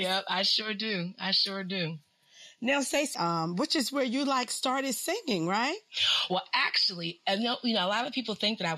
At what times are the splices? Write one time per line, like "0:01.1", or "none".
0:03.1